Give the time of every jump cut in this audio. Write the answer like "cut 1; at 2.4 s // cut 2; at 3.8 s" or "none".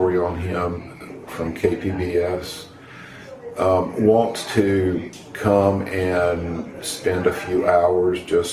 cut 1; at 1.3 s